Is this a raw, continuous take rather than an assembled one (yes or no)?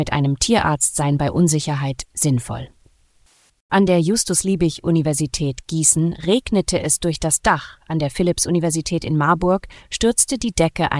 no